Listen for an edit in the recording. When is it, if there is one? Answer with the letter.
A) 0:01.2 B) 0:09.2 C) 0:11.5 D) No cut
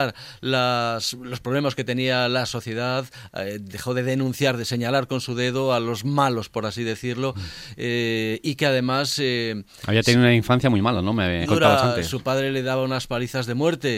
C